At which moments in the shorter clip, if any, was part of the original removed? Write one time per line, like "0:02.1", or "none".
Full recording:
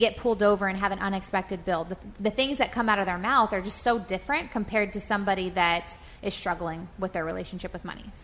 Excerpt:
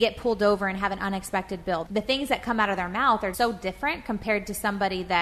0:01.9
0:03.3